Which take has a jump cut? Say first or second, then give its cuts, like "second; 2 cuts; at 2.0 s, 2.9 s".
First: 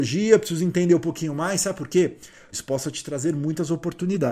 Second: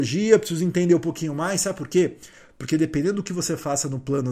first; 1 cut; at 2.5 s